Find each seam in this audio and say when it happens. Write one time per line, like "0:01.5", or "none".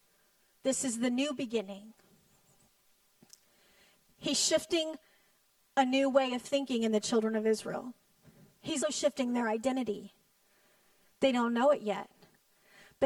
0:08.8